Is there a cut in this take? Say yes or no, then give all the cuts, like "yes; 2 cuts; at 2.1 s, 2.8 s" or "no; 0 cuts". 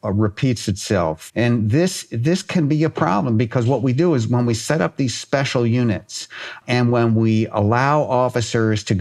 yes; 2 cuts; at 1.3 s, 6.6 s